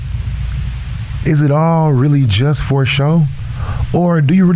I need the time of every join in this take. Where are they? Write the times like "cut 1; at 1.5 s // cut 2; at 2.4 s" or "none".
cut 1; at 1.2 s